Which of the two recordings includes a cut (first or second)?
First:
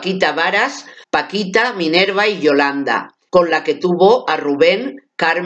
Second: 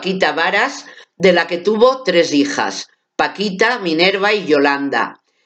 first